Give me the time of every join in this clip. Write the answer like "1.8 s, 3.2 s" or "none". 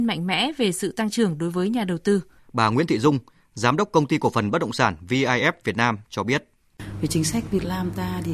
2.4 s